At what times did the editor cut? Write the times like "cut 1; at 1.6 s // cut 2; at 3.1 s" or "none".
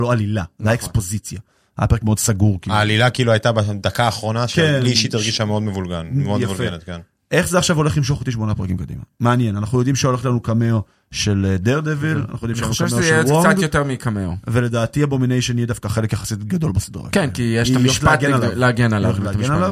none